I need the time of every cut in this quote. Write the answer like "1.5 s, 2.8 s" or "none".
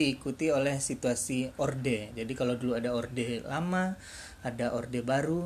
none